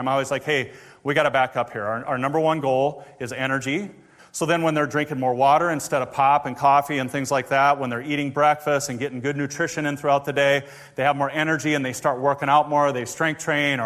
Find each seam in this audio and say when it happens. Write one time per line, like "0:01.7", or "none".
0:04.2